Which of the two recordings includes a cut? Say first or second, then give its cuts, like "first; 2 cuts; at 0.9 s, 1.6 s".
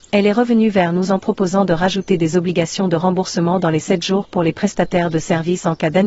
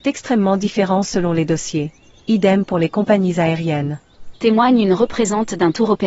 second; 1 cut; at 4.3 s